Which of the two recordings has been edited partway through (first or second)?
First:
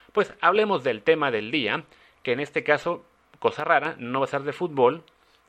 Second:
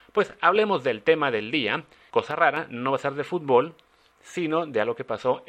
second